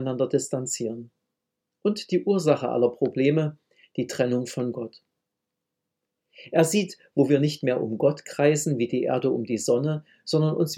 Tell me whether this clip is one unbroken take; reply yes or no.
yes